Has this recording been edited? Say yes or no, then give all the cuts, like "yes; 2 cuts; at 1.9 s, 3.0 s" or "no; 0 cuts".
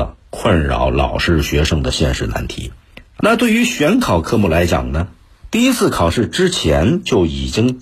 yes; 1 cut; at 3.2 s